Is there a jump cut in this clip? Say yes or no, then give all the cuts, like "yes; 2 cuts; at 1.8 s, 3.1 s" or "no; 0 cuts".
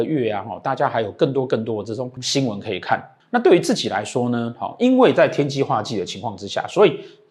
no; 0 cuts